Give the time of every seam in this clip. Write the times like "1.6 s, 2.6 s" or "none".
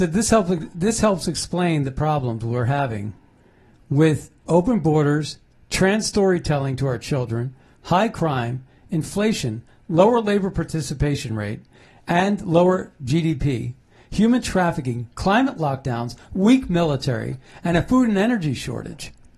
15.1 s